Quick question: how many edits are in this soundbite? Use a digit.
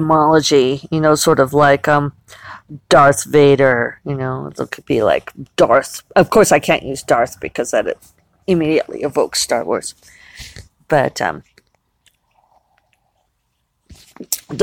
0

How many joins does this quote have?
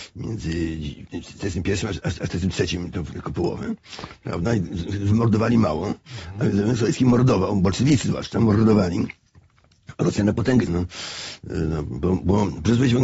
1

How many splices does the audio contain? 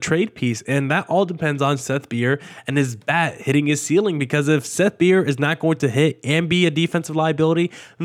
0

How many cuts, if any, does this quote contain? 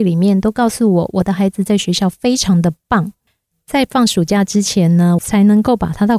2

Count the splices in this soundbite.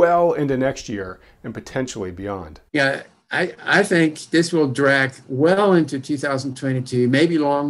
1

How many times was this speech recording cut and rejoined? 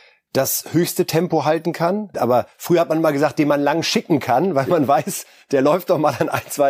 1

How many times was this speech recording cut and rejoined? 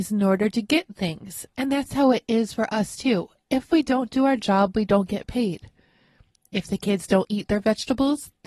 0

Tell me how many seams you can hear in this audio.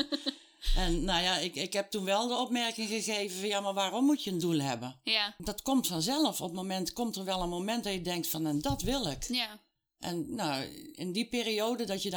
0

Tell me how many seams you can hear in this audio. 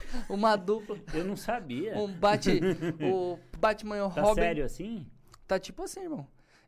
0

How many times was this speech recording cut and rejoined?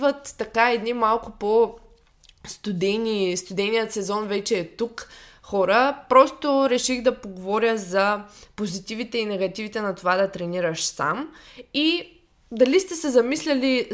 0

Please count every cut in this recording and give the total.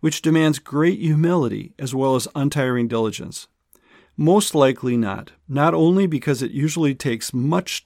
2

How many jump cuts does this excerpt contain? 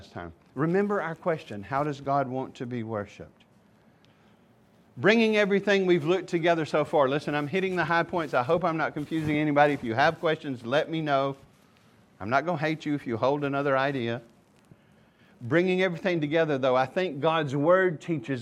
0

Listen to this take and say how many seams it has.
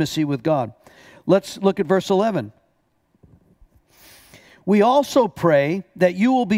0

